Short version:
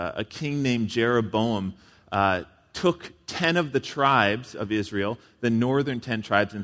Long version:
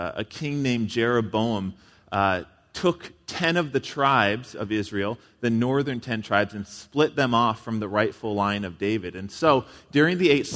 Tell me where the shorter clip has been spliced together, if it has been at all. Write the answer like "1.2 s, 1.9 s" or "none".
none

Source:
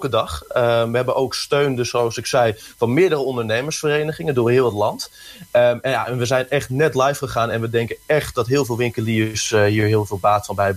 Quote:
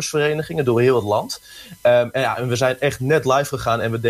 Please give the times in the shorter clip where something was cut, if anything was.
none

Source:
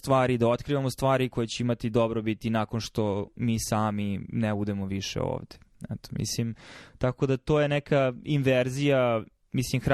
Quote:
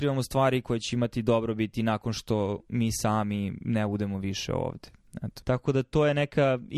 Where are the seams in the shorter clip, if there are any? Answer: 5.4 s

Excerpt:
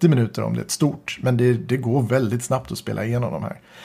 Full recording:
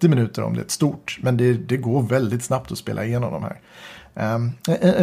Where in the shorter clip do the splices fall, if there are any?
none

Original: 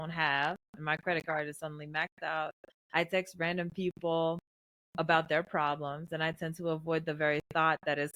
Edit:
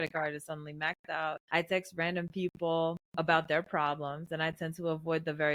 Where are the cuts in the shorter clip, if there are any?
1.4 s, 3.0 s

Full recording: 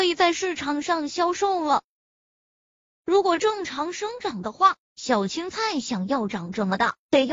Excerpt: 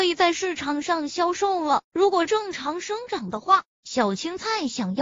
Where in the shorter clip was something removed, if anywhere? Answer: 1.9 s

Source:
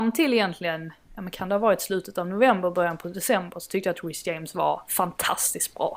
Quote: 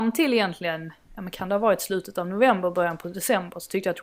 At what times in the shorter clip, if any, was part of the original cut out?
none

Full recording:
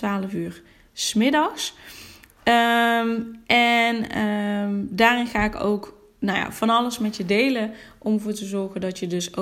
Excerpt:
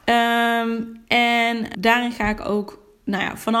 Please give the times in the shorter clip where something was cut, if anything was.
1.7 s

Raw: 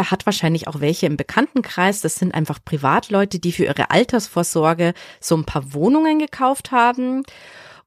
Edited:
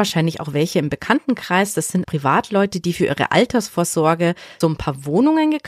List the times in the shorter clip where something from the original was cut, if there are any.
2.0 s, 4.6 s

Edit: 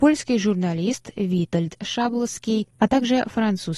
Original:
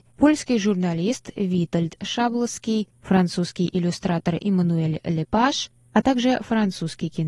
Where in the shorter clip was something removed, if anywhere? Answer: 2.8 s

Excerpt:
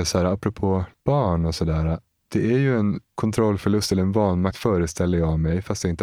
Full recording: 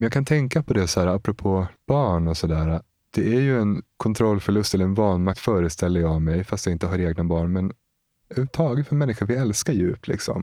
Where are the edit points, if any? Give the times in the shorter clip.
none

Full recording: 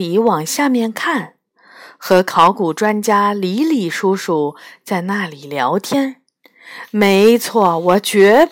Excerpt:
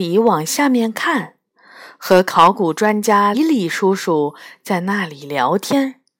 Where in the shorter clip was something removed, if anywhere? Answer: 3.3 s

